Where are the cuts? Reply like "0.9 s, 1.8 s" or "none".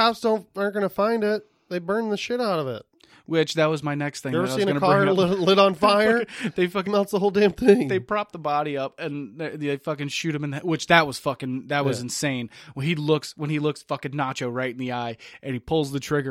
6.9 s